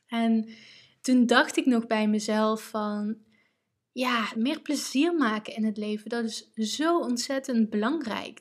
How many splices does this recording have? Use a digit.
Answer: 1